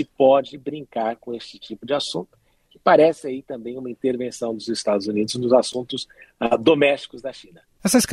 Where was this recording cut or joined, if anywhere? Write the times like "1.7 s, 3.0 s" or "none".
none